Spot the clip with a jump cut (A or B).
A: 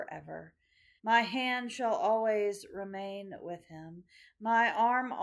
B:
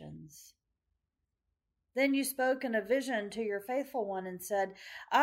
A